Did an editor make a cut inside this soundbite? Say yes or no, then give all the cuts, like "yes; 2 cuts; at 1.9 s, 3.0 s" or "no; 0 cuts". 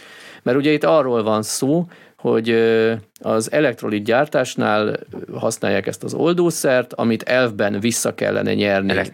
no; 0 cuts